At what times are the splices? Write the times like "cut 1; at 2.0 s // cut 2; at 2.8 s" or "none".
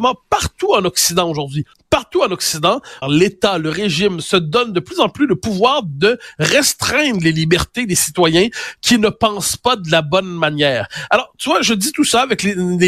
cut 1; at 1.7 s // cut 2; at 3.0 s